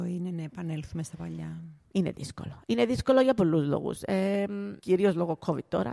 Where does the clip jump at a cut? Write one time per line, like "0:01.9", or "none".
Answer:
0:01.8
0:04.8